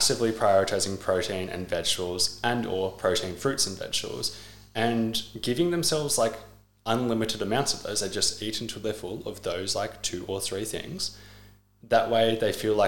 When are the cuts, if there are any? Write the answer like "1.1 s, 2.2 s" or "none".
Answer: none